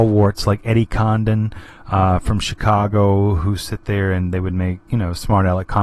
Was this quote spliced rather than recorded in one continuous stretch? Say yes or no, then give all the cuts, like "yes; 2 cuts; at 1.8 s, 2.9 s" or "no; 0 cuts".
no; 0 cuts